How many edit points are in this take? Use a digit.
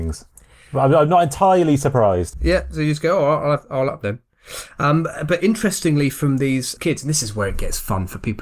1